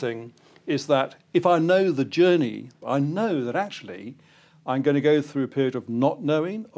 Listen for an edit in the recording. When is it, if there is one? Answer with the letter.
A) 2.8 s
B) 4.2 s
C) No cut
A